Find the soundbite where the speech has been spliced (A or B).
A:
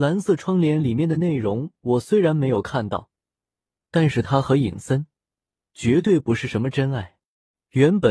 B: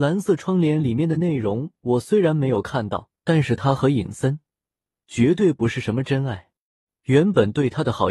B